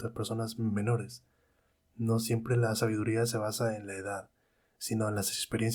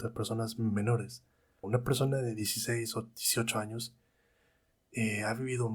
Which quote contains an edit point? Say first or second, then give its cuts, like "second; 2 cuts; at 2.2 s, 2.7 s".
second; 1 cut; at 1.6 s